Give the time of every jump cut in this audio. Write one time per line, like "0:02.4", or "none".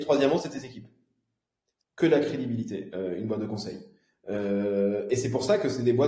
0:01.8